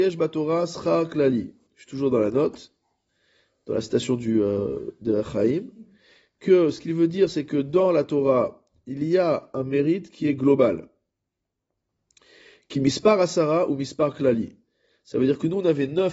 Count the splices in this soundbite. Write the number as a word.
zero